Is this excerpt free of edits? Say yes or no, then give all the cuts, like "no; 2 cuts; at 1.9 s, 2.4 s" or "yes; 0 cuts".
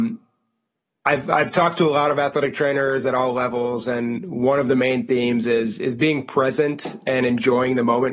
yes; 0 cuts